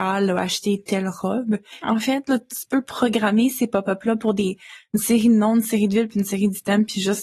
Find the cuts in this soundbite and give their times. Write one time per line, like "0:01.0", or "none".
0:01.8